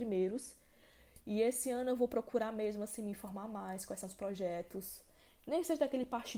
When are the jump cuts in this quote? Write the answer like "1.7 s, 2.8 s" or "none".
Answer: none